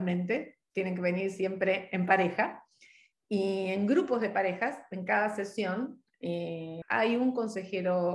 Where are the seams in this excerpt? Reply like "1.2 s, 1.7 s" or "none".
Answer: 6.8 s